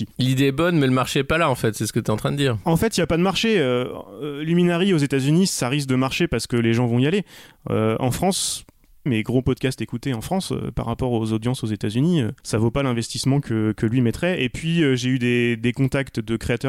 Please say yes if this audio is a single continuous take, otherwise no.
no